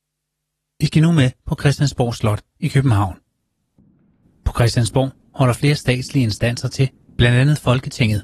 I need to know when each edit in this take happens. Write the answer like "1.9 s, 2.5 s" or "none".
none